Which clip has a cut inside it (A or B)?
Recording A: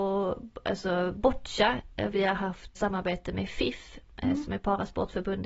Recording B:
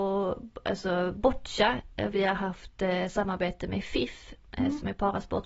A